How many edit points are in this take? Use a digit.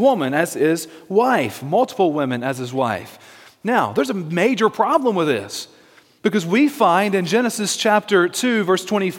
0